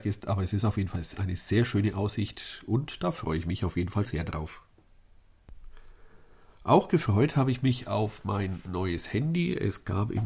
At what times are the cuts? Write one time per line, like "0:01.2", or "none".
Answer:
0:04.1